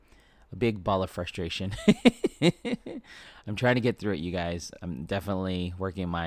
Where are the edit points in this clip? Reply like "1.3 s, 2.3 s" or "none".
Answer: none